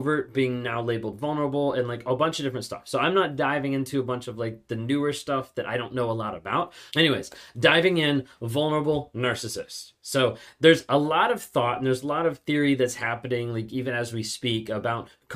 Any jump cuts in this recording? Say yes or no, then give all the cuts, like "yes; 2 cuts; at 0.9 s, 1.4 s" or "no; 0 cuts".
yes; 1 cut; at 6.9 s